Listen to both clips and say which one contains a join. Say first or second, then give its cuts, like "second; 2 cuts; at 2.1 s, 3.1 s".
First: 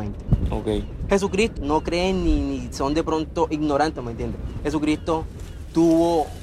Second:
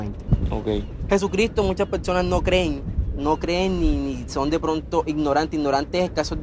first; 2 cuts; at 1.6 s, 3.9 s